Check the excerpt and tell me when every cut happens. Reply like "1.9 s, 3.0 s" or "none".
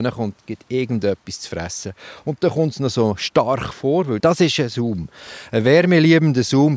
none